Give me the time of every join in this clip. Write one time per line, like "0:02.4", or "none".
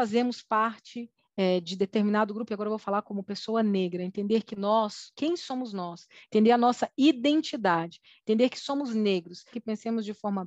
0:09.5